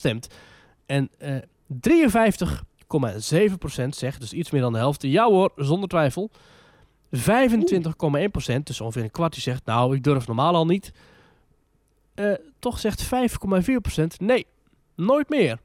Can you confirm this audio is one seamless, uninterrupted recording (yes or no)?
yes